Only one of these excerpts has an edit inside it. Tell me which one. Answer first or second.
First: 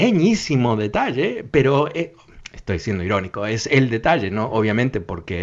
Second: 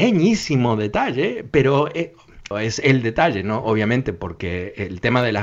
second